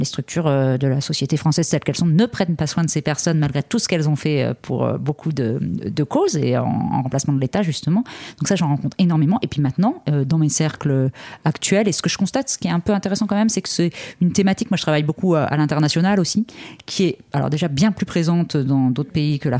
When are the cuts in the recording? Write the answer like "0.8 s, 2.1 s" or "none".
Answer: none